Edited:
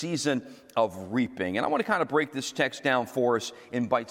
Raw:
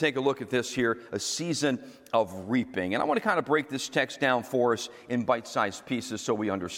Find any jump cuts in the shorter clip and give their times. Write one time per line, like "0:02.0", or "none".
none